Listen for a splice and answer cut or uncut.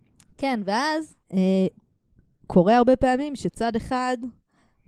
cut